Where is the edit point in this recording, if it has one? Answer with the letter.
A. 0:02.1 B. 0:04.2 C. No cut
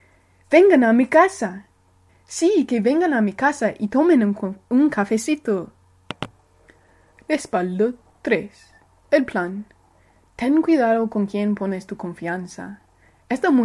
A